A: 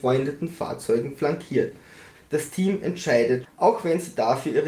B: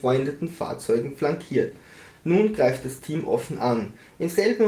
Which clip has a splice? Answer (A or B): A